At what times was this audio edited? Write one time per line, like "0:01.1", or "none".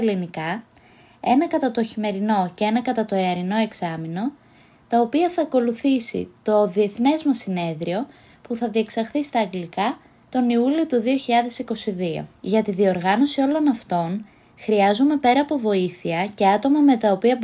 0:12.4